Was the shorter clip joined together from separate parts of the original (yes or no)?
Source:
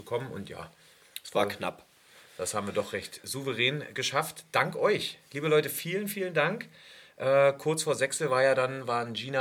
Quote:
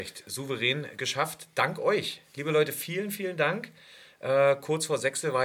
no